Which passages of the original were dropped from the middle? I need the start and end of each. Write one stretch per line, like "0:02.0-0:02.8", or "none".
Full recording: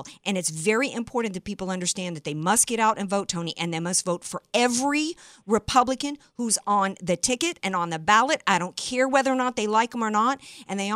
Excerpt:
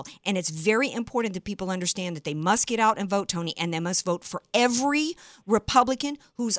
none